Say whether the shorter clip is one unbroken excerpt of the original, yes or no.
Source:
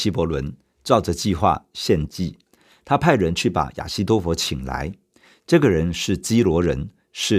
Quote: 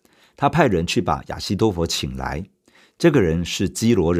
yes